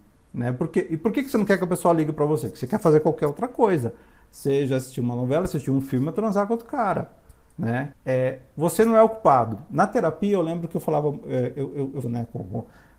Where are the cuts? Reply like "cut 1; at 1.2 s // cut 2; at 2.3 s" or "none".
cut 1; at 7.9 s // cut 2; at 12.0 s